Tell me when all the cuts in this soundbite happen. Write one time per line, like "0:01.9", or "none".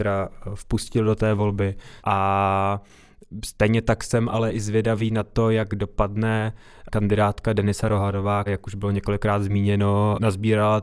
0:02.0
0:08.5